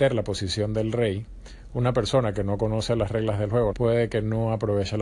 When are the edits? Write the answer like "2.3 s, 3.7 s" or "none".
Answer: 3.7 s